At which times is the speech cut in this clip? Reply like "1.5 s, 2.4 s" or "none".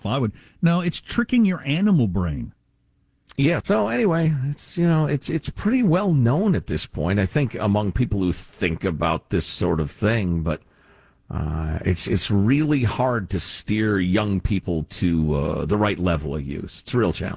3.6 s

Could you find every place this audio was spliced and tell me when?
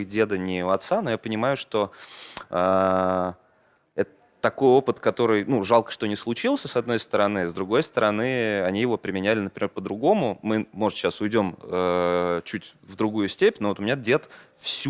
none

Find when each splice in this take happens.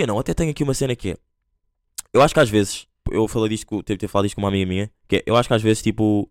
3.0 s

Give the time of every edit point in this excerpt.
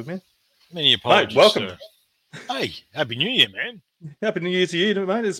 none

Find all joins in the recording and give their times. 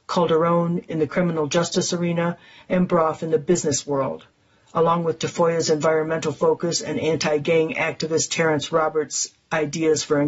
none

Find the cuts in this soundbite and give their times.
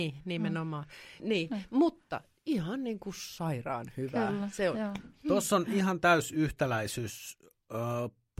1.2 s

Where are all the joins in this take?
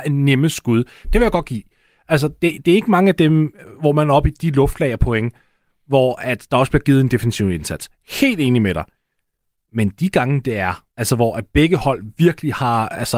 1.0 s, 10.9 s

